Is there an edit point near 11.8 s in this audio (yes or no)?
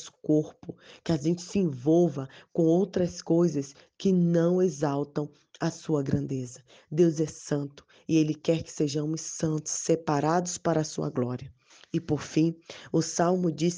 no